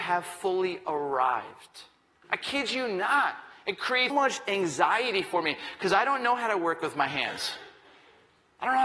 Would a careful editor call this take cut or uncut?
cut